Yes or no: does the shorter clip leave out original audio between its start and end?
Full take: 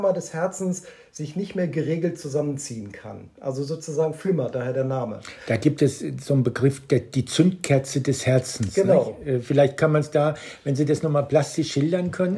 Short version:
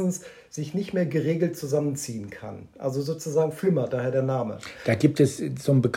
no